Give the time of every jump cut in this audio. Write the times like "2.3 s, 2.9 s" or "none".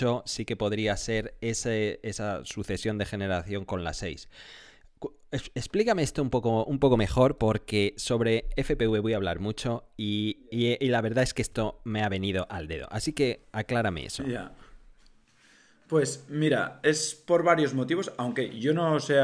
none